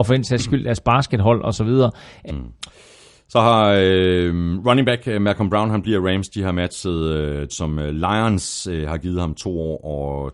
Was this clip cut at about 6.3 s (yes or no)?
no